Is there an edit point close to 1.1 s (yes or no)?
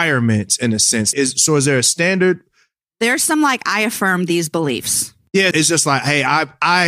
yes